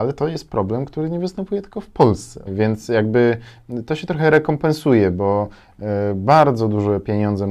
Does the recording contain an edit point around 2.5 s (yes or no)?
yes